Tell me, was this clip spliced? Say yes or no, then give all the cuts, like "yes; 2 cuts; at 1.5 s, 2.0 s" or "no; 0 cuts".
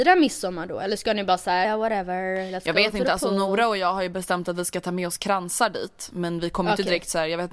yes; 1 cut; at 1.6 s